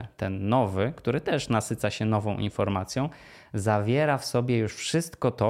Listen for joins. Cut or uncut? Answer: uncut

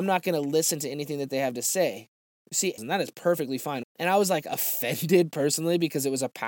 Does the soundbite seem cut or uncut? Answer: cut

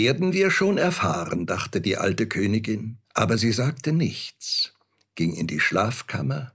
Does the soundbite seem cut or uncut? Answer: cut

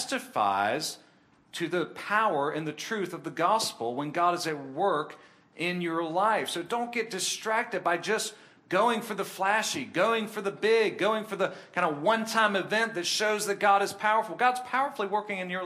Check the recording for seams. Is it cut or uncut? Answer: uncut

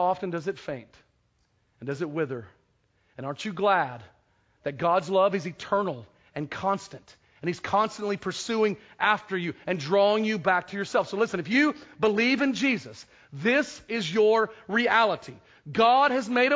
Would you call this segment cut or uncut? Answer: uncut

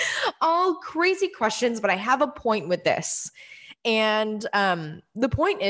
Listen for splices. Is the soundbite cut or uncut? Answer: uncut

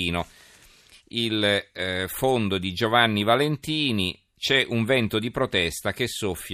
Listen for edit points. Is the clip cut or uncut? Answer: uncut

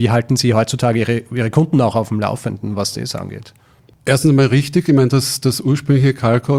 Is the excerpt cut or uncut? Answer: uncut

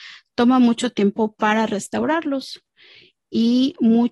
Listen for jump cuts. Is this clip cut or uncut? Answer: uncut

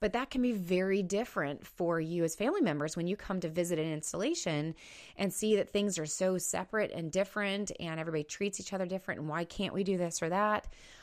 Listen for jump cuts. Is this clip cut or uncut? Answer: uncut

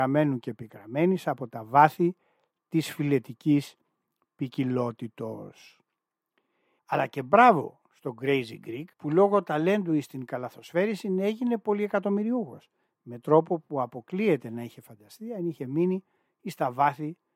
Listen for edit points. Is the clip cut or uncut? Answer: cut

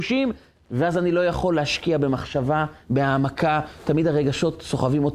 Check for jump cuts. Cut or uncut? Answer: cut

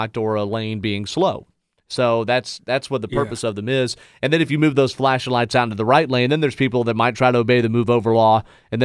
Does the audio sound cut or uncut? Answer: uncut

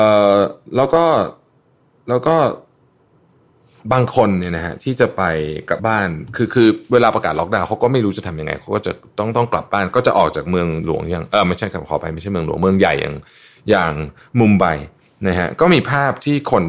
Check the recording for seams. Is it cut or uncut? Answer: cut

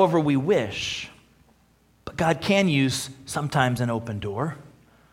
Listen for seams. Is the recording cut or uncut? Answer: uncut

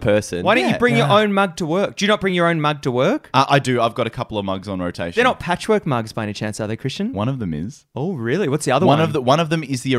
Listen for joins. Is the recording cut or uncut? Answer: uncut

